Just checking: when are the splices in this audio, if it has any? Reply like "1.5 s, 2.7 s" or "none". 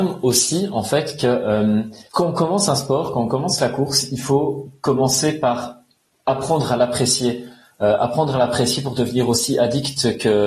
2.1 s